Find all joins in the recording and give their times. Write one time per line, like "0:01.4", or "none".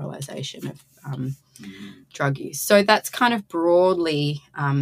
none

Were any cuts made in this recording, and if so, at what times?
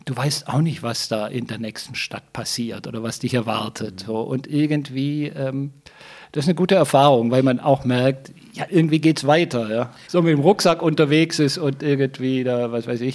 0:08.7
0:10.1

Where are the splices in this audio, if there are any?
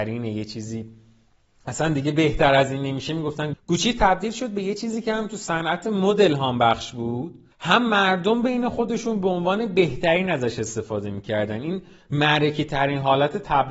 0:03.5
0:07.5

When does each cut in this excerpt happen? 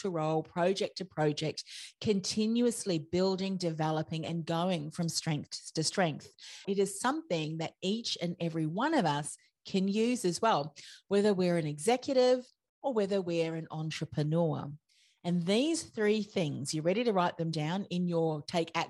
0:06.6

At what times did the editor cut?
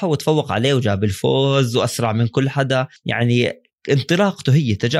0:03.0

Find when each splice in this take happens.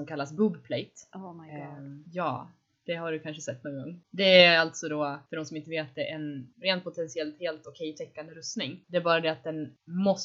0:04.0

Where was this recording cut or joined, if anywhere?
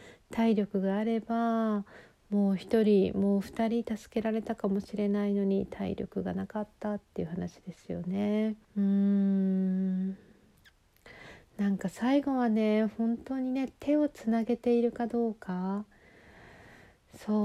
0:08.6

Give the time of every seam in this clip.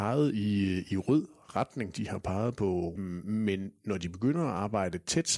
0:03.0

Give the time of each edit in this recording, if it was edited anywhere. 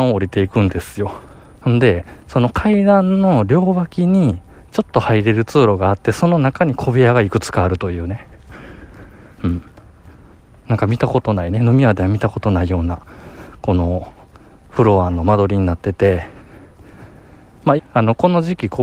0:01.5
0:17.8

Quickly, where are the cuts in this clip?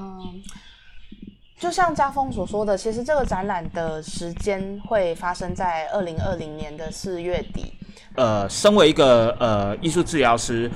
0:08.1

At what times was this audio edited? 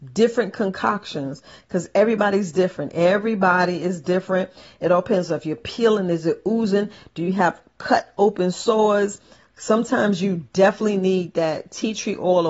none

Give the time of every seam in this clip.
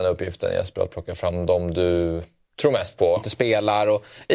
0:03.2

